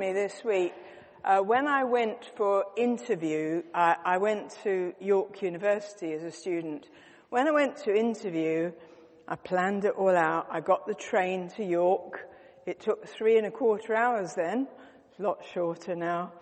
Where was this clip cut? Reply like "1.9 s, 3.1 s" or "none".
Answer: none